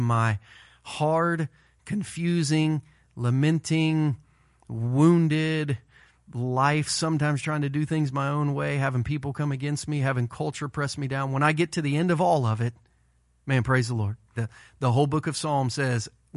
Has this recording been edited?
yes; 1 cut; at 14.4 s

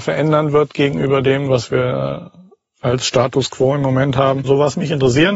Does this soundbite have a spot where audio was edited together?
no; 0 cuts

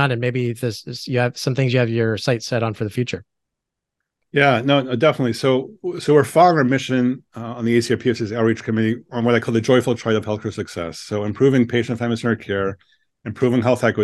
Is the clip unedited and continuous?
yes; 0 cuts

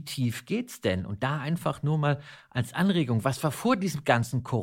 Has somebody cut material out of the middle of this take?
no; 0 cuts

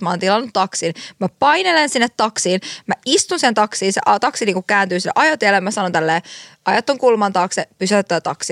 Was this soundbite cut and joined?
no; 0 cuts

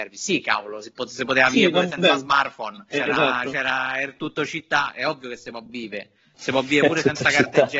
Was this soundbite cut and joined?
yes; 1 cut; at 2.9 s

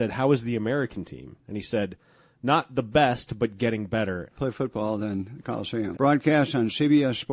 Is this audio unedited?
no; 2 cuts; at 4.3 s, 5.9 s

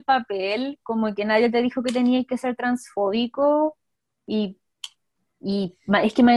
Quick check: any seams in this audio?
no; 0 cuts

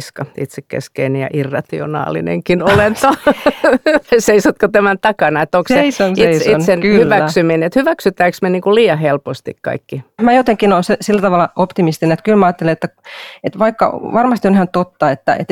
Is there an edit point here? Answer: no; 0 cuts

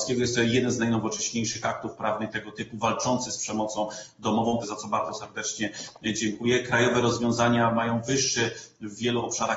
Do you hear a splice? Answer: yes; 1 cut; at 4.6 s

